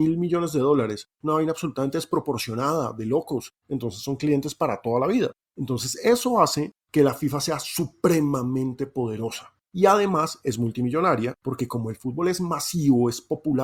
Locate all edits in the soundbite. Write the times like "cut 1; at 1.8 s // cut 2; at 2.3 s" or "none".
cut 1; at 1.2 s // cut 2; at 3.6 s